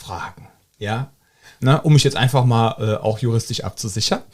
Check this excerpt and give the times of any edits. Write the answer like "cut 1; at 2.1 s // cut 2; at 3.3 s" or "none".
cut 1; at 1.6 s